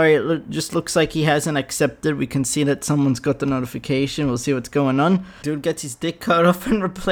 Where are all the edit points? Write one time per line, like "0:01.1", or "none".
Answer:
0:05.4